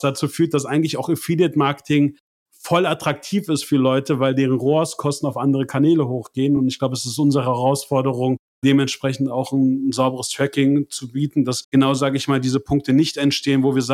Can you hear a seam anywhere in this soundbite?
no; 0 cuts

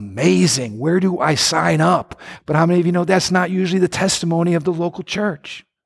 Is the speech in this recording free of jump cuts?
no; 1 cut; at 2.4 s

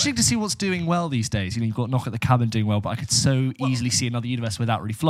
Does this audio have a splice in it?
no; 0 cuts

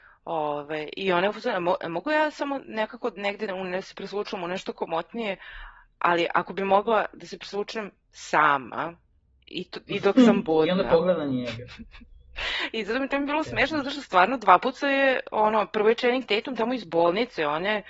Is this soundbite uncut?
yes; 0 cuts

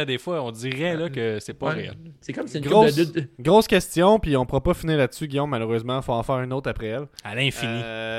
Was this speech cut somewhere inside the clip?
yes; 1 cut; at 3.4 s

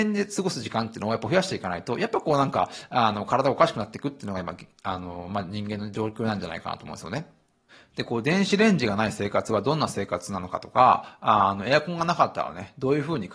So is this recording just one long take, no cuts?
yes; 0 cuts

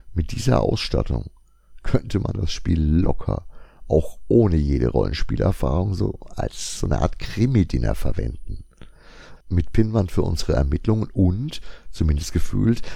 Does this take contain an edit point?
yes; 1 cut; at 9.4 s

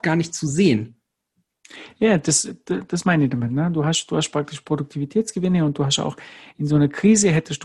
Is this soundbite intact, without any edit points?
yes; 0 cuts

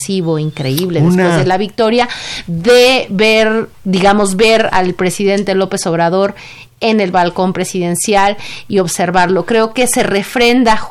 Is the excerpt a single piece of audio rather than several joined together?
yes; 0 cuts

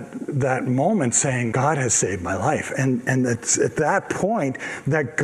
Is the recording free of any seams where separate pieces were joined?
no; 1 cut; at 1.5 s

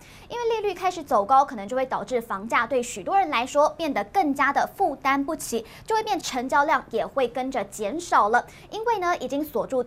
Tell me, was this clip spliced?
yes; 1 cut; at 6.2 s

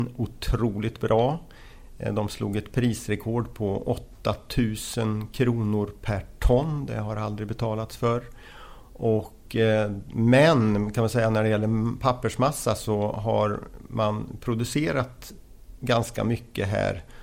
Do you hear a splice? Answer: no; 0 cuts

